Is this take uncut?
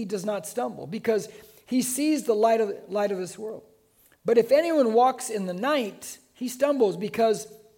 yes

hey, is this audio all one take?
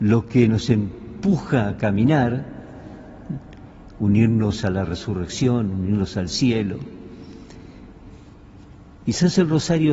no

